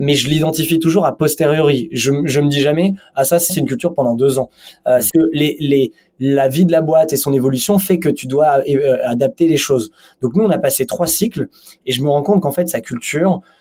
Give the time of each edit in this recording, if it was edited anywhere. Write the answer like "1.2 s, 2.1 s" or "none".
3.5 s, 5.1 s